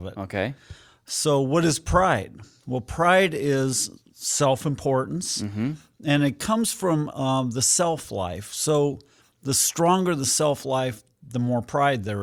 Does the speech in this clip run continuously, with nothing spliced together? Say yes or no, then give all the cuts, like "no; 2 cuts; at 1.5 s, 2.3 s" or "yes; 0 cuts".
yes; 0 cuts